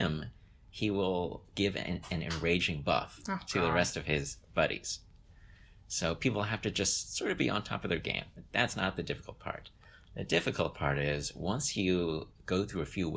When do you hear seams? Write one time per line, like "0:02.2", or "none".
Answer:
none